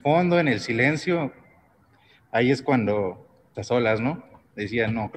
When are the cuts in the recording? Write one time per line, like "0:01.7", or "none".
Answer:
0:03.5